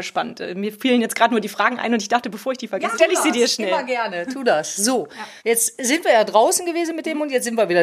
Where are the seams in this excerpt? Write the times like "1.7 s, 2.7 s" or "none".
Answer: 5.4 s